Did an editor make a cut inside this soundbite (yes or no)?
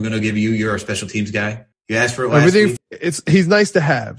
yes